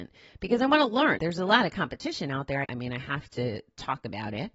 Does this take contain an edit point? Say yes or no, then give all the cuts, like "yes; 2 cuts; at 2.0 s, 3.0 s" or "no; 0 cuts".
yes; 2 cuts; at 1.2 s, 2.6 s